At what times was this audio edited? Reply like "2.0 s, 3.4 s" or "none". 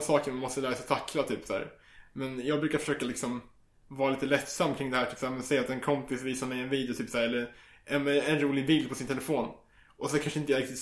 none